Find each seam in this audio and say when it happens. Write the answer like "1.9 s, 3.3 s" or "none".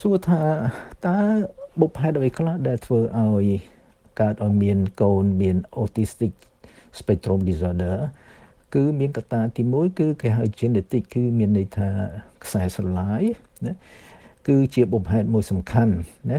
10.5 s